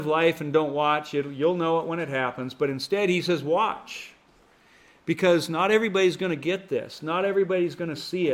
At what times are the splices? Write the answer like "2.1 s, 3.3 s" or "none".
none